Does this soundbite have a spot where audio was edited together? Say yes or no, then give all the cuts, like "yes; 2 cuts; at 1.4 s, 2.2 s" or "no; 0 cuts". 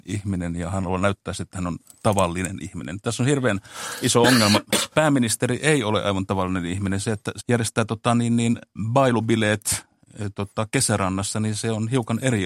yes; 1 cut; at 7.4 s